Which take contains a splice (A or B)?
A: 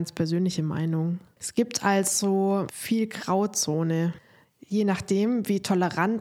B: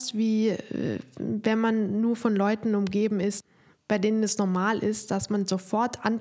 A